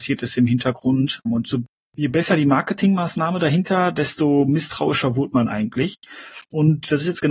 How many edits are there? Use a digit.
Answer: 1